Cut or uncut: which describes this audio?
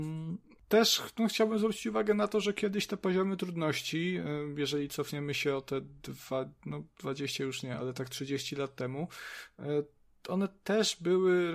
uncut